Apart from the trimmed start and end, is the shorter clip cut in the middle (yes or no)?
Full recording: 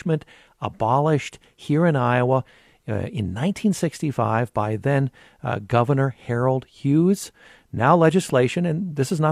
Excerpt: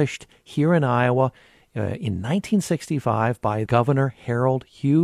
yes